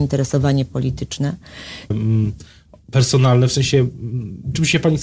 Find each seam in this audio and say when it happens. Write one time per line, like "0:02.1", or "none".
0:01.9

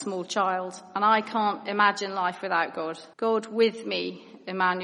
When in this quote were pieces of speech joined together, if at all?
0:03.1

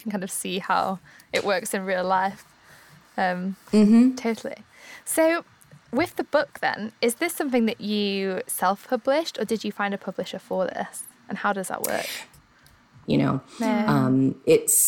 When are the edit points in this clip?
0:13.1

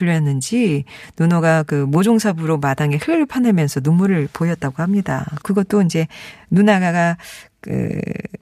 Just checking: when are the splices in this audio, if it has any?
0:05.4

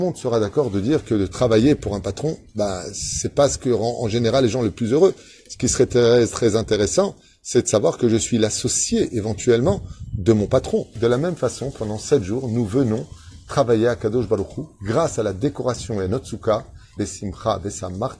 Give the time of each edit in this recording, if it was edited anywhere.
0:11.0
0:17.0

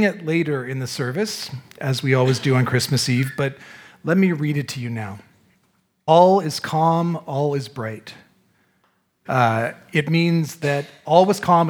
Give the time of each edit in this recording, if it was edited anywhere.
0:06.1
0:09.3

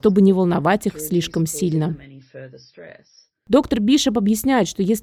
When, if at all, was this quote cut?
none

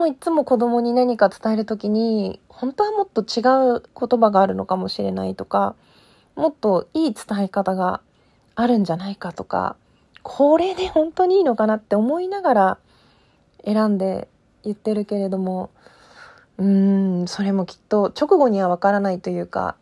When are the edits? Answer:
none

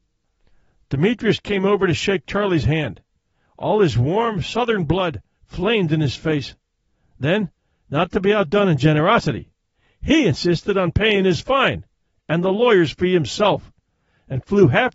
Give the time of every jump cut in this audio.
none

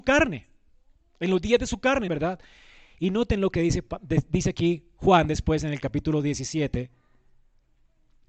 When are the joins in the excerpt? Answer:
0:02.1

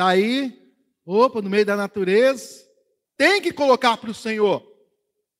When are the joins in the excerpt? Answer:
0:03.0

